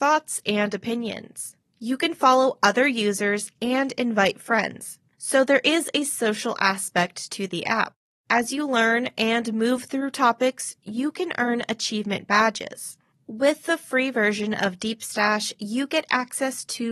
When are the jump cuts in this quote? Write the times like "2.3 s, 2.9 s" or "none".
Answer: none